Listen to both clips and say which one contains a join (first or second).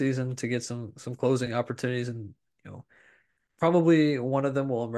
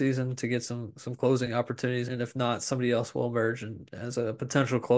second